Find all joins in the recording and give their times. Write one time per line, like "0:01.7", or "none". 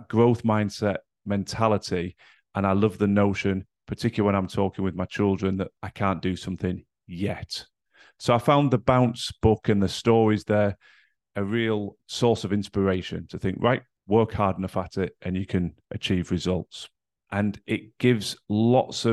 0:12.0
0:14.0
0:17.2